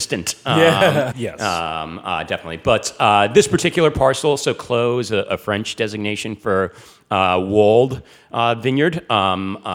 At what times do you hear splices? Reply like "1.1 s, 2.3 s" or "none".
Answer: 1.1 s